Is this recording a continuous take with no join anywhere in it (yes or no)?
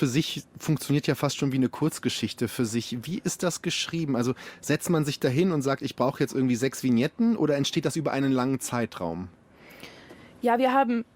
yes